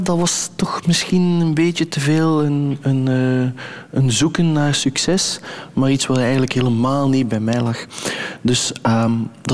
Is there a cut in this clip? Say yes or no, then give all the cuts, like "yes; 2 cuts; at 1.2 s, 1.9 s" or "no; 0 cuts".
no; 0 cuts